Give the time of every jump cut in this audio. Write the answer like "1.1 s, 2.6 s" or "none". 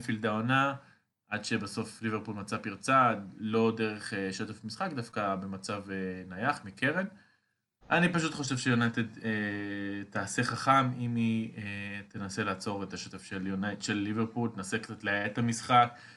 7.8 s